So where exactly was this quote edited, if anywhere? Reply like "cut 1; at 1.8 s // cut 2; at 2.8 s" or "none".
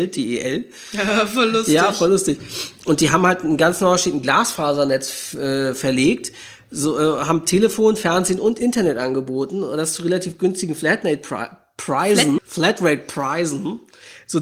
cut 1; at 12.4 s